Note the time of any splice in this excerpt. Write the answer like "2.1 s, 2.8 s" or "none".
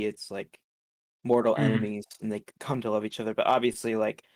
none